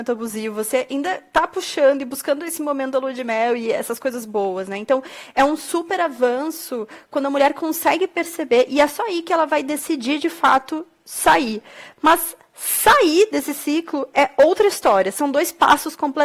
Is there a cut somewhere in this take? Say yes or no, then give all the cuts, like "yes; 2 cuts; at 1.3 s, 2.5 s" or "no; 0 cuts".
no; 0 cuts